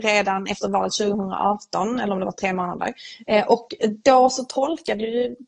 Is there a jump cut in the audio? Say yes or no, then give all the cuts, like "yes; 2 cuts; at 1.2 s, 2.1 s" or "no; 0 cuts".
no; 0 cuts